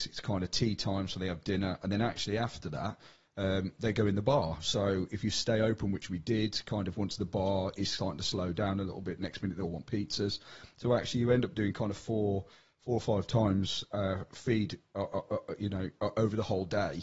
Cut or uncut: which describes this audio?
uncut